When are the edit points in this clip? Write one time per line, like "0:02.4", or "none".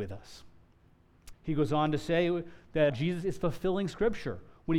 0:01.3
0:02.9